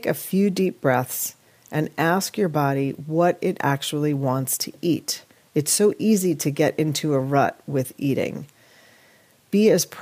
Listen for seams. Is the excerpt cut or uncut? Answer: uncut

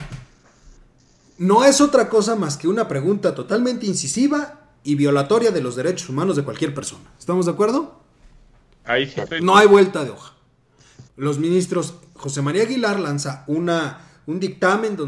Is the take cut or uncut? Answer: cut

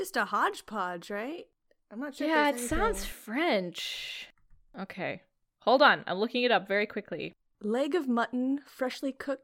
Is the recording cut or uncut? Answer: cut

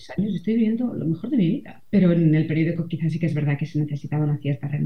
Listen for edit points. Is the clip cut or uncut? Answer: cut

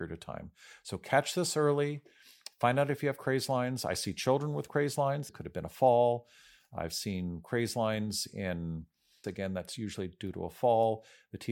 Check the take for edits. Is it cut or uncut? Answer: cut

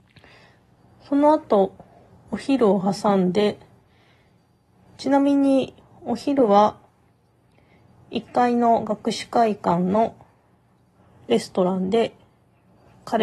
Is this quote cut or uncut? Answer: uncut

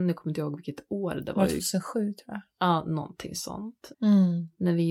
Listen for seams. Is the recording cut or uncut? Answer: cut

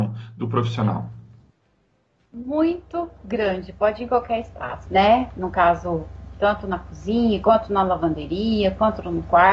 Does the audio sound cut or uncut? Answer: cut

